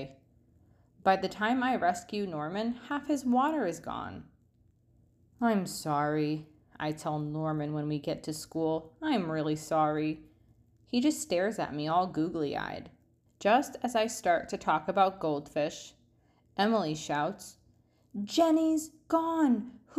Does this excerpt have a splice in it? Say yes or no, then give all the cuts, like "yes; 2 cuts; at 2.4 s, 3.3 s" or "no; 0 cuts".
yes; 1 cut; at 13.3 s